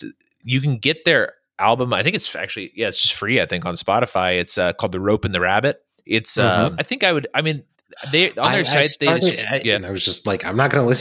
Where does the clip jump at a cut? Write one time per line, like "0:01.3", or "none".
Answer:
0:06.8
0:09.7